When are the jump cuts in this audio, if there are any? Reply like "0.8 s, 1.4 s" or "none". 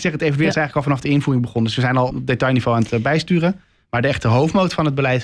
2.1 s